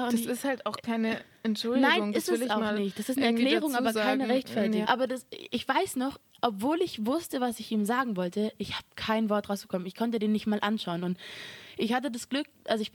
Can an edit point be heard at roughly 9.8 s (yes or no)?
no